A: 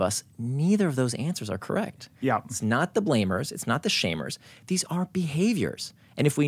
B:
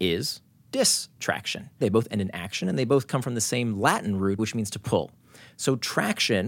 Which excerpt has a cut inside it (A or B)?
B